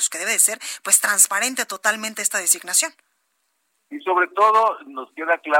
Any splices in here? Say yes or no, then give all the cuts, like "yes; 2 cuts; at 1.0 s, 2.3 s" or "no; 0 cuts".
no; 0 cuts